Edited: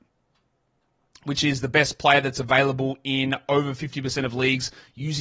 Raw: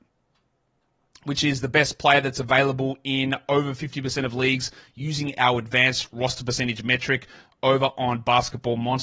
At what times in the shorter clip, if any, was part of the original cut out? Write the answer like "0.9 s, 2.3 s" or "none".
none

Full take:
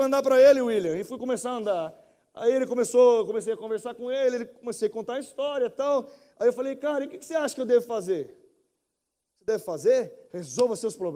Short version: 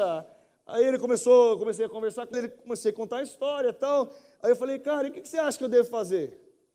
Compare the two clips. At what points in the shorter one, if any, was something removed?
2.3 s

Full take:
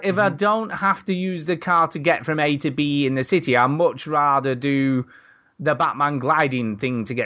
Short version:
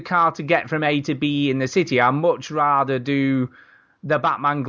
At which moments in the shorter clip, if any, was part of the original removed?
none

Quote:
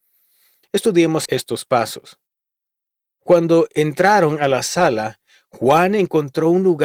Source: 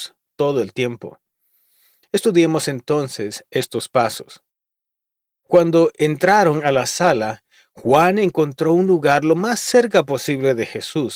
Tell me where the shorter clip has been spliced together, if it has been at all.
1.3 s

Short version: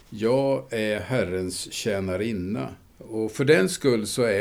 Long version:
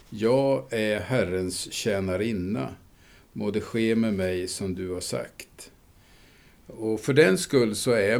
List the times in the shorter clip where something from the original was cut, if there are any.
2.9 s

